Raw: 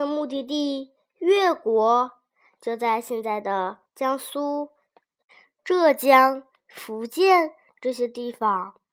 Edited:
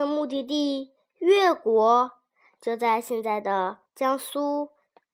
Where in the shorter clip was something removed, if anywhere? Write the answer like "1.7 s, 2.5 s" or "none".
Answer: none

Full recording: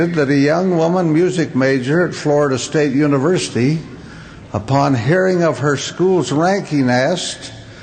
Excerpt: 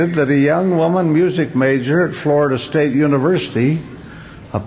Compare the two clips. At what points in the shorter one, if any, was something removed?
none

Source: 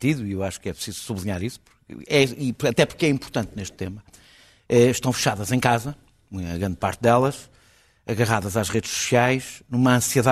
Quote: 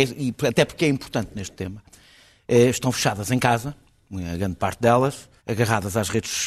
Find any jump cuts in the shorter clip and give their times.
5.4 s

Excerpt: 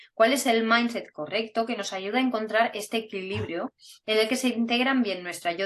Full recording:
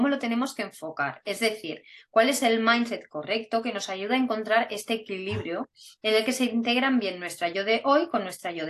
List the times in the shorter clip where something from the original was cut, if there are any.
none

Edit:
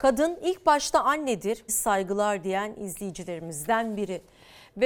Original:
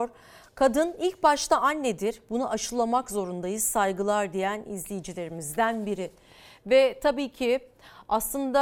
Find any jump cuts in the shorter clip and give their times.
1.7 s

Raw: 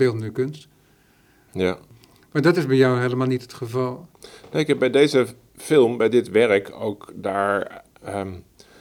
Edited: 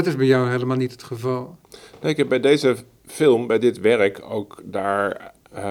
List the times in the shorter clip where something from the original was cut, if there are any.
none

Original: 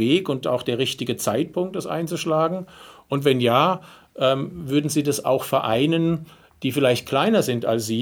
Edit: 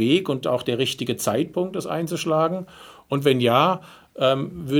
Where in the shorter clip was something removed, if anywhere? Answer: none

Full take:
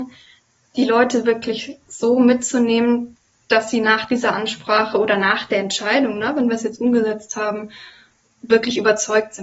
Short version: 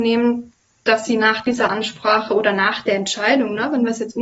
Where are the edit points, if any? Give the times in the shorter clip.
none

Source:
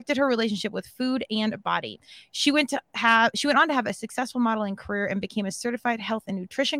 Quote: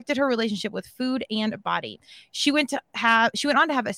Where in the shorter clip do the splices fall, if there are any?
none

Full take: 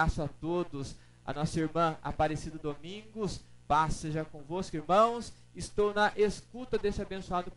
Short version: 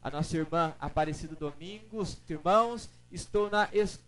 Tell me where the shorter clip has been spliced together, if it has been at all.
2.3 s

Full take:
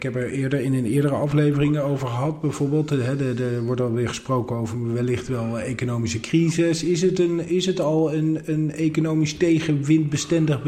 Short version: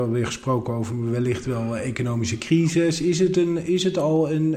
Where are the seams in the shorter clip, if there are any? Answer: none

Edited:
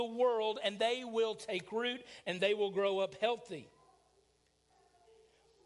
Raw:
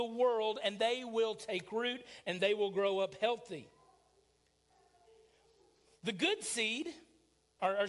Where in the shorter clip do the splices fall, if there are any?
none

